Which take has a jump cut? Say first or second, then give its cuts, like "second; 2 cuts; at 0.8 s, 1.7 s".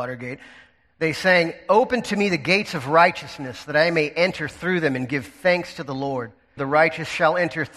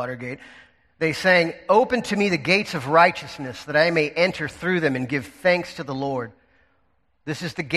first; 1 cut; at 6.6 s